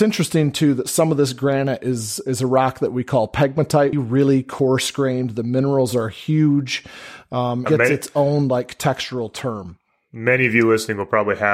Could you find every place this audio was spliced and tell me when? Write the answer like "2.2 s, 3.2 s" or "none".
3.9 s, 7.7 s